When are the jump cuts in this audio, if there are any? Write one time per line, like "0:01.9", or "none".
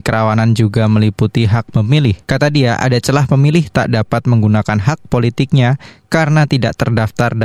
0:02.2